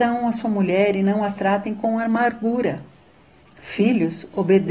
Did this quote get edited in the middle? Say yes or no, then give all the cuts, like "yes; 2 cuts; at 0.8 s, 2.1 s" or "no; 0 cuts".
no; 0 cuts